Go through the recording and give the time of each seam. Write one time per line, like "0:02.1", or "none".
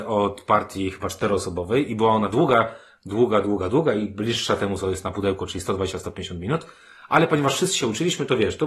none